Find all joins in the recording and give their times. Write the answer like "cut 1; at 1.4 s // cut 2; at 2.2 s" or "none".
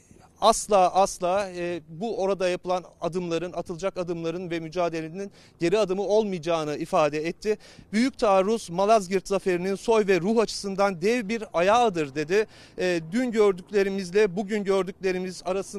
none